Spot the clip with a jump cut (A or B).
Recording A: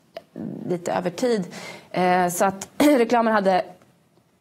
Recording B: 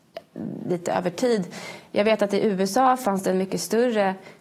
A